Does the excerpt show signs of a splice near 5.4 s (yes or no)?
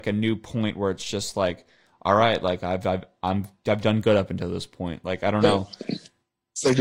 no